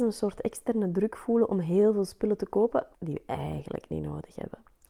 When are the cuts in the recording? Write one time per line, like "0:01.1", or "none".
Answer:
0:02.9